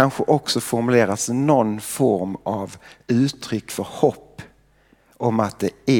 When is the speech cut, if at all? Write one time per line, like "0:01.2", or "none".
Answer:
none